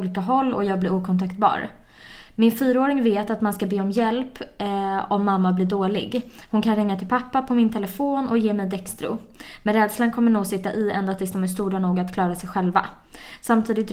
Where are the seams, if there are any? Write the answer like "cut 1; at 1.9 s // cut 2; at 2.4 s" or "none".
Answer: none